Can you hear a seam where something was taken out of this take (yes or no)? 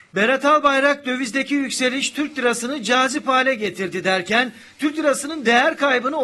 no